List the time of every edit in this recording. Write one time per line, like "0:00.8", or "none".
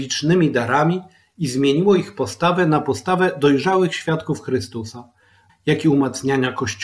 0:05.5